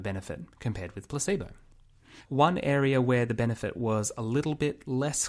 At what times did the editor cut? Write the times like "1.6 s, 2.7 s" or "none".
2.2 s